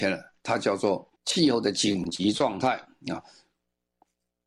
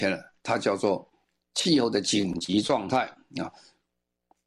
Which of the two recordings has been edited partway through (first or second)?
first